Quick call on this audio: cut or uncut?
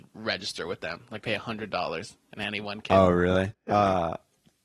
cut